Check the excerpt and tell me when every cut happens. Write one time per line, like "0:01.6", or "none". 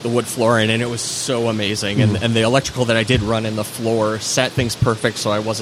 none